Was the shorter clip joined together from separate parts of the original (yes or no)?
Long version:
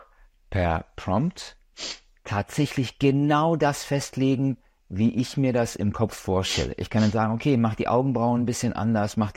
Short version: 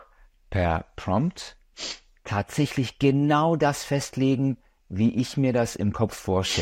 no